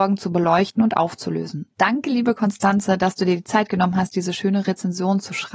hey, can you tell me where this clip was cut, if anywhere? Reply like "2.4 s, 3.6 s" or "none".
1.7 s